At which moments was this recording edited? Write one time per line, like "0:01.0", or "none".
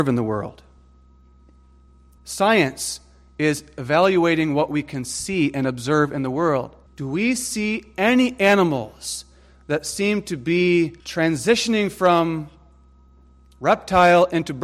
0:02.2
0:06.9
0:11.0